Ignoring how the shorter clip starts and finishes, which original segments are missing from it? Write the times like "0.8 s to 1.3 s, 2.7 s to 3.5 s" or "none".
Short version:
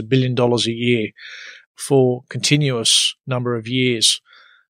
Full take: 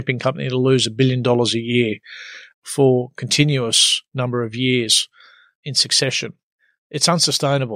none